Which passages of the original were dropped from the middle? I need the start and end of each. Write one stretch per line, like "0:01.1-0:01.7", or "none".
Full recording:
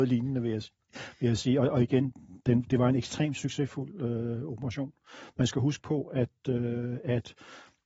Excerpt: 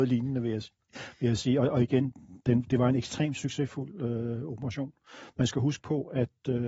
none

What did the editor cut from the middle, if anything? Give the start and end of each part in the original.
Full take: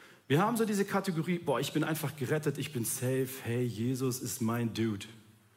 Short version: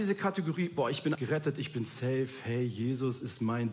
0:01.8-0:02.1

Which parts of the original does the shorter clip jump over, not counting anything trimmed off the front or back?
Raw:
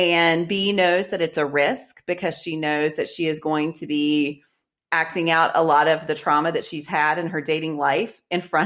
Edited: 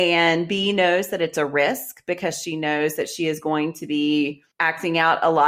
0:04.5-0:04.8

